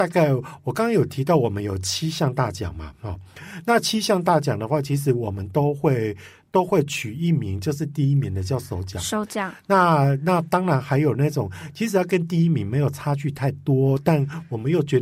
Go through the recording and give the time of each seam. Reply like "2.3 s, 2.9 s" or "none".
none

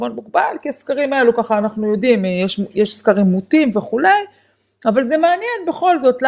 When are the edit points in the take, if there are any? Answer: none

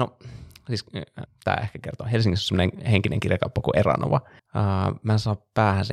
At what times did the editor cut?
1.3 s, 4.4 s

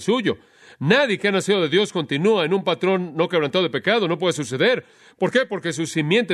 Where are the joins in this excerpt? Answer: none

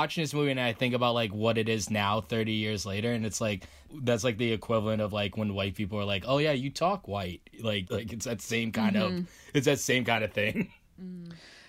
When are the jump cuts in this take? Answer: 7.9 s

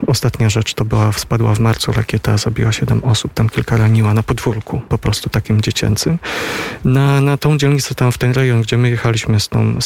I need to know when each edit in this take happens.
6.8 s

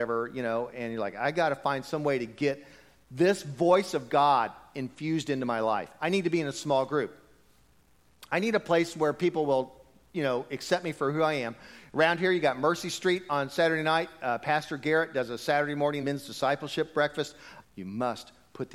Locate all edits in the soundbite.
16.0 s, 17.6 s

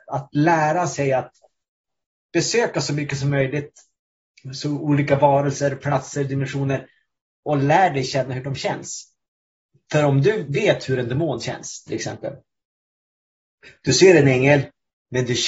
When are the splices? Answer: none

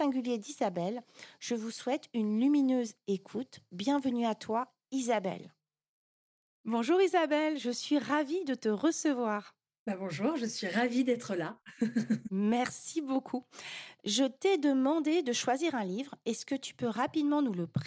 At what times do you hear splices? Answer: none

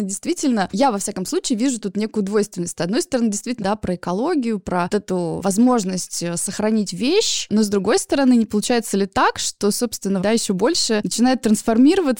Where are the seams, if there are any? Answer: 3.6 s, 4.9 s, 10.2 s

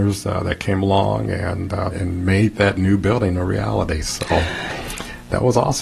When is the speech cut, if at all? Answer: 1.9 s

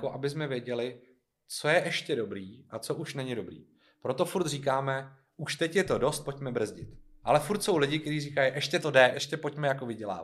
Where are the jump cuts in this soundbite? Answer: 7.2 s, 9.1 s

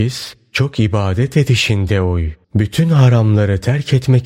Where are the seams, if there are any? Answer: 2.4 s

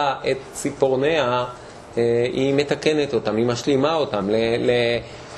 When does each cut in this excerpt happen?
4.2 s

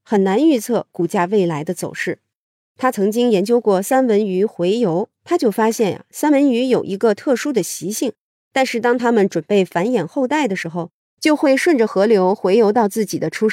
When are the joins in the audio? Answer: 2.6 s, 5.1 s, 8.4 s

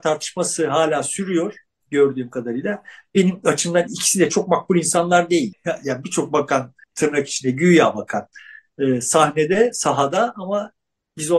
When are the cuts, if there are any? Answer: 5.5 s, 6.8 s

